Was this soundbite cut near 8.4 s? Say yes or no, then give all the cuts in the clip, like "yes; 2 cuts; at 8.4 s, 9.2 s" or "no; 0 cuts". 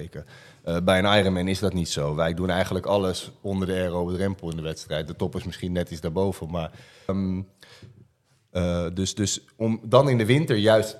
no; 1 cut; at 7.1 s